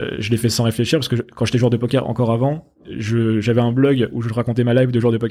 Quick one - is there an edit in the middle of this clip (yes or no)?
no